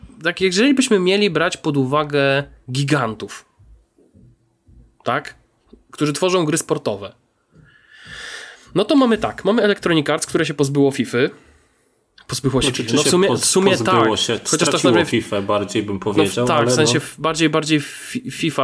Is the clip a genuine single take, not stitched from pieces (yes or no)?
yes